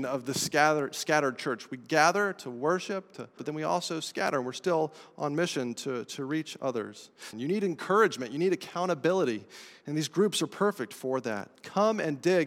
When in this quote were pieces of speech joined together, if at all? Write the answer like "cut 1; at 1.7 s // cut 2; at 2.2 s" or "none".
cut 1; at 3.4 s // cut 2; at 7.3 s